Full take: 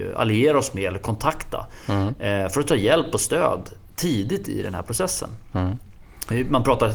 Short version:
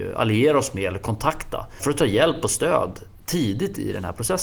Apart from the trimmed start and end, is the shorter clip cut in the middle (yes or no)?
yes